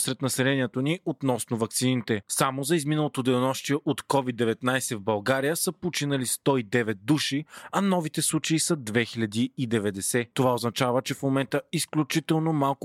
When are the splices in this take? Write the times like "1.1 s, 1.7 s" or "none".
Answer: 2.2 s, 10.3 s